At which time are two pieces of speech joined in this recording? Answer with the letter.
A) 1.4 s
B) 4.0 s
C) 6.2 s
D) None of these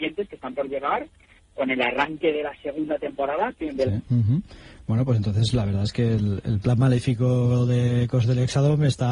B